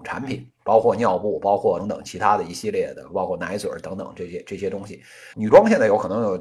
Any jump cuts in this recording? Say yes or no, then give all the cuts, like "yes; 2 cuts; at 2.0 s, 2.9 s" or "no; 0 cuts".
yes; 2 cuts; at 1.8 s, 5.3 s